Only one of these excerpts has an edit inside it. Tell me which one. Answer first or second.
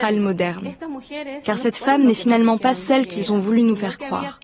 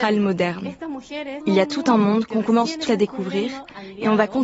second